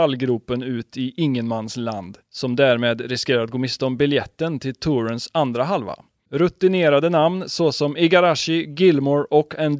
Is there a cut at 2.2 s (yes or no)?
yes